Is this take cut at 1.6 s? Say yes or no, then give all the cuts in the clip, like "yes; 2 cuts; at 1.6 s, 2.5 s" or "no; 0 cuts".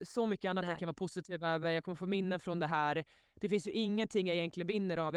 no; 0 cuts